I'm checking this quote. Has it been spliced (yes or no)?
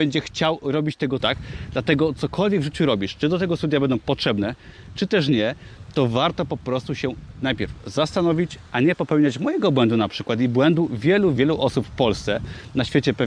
yes